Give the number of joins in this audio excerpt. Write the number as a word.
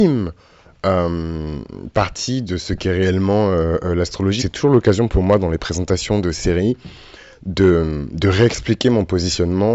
one